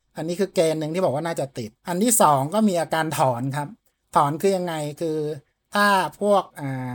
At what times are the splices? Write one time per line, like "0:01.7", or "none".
0:01.8